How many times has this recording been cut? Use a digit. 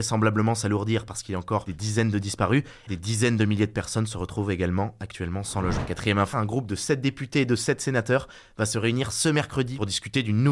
2